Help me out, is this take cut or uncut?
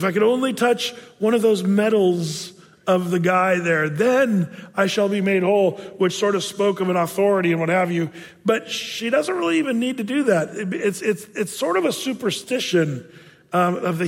uncut